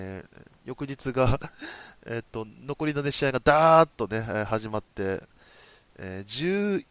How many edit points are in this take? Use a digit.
0